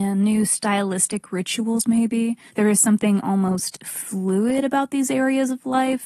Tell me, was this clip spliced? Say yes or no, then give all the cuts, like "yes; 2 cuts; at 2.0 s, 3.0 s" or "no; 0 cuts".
yes; 1 cut; at 2.5 s